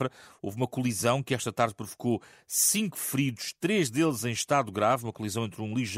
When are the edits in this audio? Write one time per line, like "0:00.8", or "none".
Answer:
none